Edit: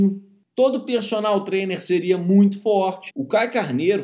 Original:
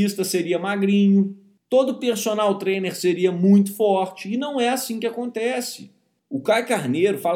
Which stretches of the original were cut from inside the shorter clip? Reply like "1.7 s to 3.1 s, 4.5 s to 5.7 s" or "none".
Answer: 4.2 s to 6.2 s